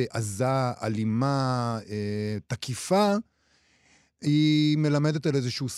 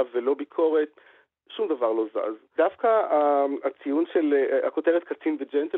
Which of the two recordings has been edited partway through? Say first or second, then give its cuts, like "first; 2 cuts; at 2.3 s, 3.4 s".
second; 1 cut; at 2.6 s